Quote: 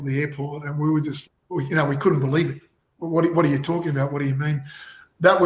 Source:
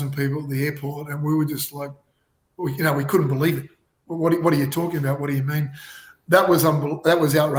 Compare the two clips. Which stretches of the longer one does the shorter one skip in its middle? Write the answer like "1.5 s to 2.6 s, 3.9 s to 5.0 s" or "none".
1.7 s to 2.3 s